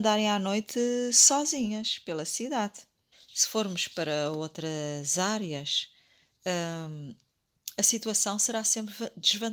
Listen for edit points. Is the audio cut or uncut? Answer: cut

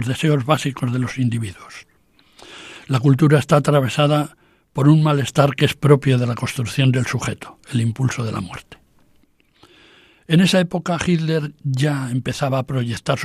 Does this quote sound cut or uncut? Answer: uncut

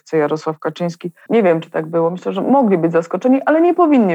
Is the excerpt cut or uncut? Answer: cut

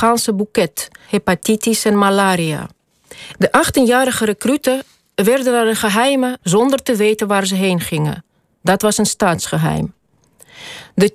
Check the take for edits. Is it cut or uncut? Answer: cut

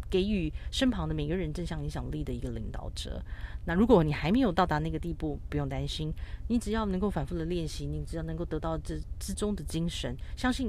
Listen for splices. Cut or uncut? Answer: uncut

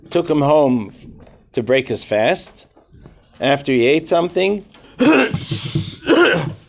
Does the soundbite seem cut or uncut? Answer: cut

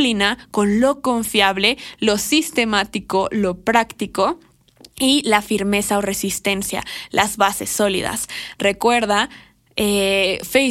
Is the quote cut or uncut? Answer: uncut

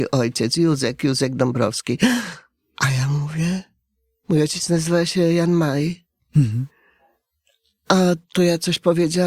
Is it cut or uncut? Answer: uncut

